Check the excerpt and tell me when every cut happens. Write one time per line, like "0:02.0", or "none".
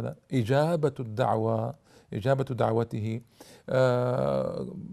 none